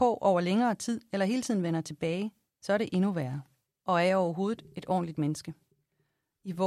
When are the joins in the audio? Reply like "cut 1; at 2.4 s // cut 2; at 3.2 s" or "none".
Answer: cut 1; at 3.8 s

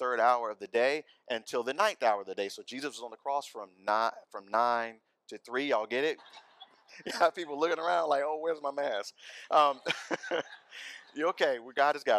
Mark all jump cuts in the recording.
cut 1; at 6.2 s

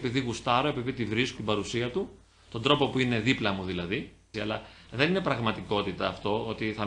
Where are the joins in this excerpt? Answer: cut 1; at 1.4 s // cut 2; at 4.3 s

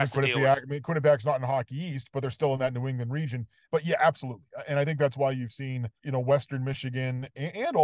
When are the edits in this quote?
cut 1; at 3.6 s // cut 2; at 6.0 s

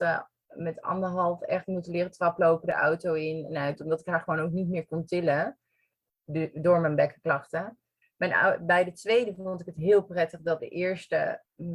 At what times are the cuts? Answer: cut 1; at 8.0 s // cut 2; at 10.6 s

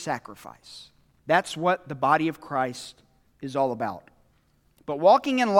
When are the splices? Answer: cut 1; at 1.2 s

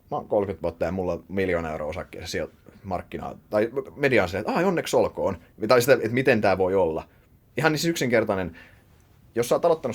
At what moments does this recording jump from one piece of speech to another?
cut 1; at 5.5 s

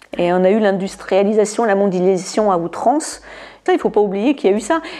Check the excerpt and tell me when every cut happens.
cut 1; at 3.7 s

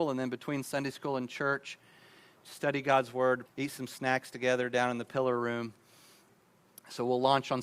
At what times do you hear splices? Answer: cut 1; at 3.5 s

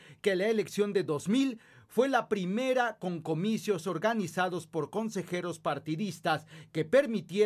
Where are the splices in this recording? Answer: none

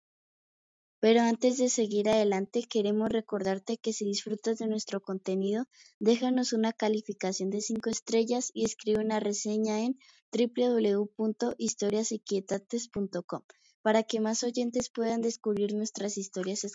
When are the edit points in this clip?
none

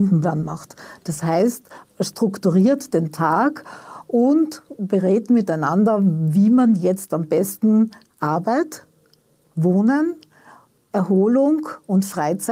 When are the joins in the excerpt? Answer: cut 1; at 1.8 s

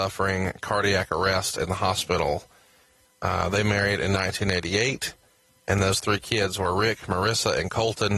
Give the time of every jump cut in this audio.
cut 1; at 3.0 s

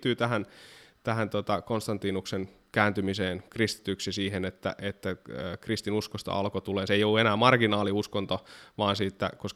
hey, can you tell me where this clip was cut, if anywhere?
none

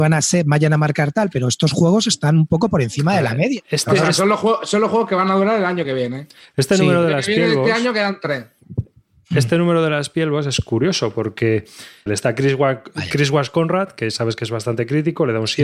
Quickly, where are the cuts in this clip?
cut 1; at 12.1 s

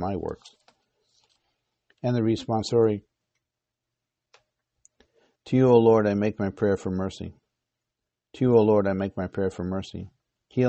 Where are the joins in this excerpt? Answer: none

